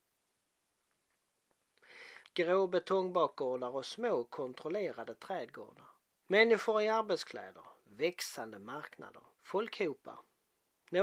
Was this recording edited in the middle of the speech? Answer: yes; 3 cuts; at 2.2 s, 6.2 s, 9.3 s

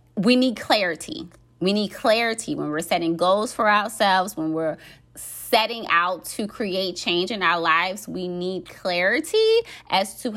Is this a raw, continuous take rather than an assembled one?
yes; 0 cuts

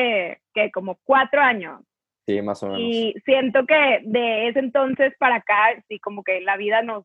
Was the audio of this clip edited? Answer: no; 0 cuts

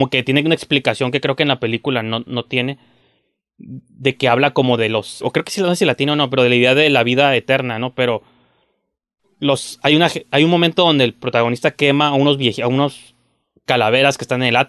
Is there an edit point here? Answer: yes; 1 cut; at 5.2 s

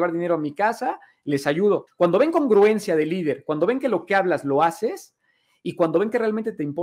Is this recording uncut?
no; 1 cut; at 1.9 s

